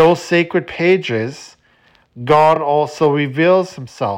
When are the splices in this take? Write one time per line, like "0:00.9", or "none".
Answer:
none

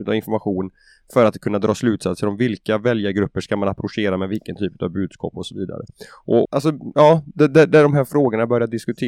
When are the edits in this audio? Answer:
0:06.4

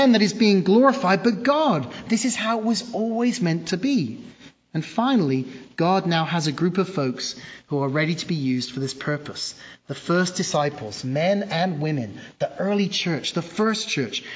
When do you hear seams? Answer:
none

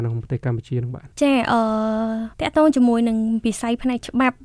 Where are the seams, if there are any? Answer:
0:01.1
0:02.3

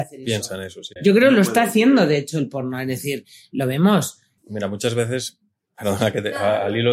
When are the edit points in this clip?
0:01.0
0:04.4

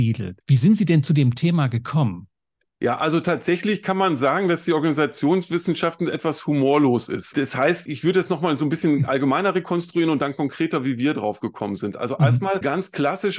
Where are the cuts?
none

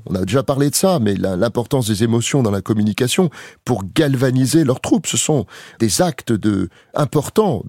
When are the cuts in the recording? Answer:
none

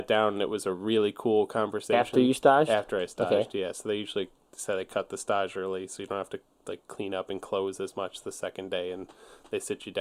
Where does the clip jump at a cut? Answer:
none

